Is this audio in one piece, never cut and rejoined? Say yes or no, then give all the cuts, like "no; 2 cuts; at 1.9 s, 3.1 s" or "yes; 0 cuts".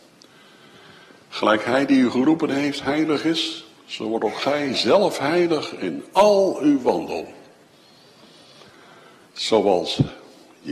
no; 1 cut; at 9.2 s